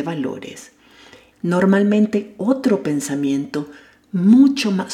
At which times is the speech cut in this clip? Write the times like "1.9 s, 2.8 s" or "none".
1.3 s